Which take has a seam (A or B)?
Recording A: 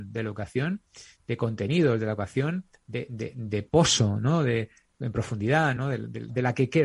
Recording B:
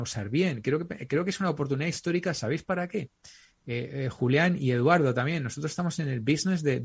A